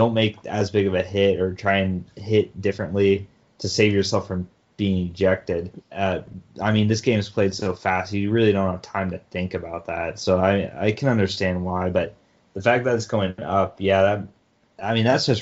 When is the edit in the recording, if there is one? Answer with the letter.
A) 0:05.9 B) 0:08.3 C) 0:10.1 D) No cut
A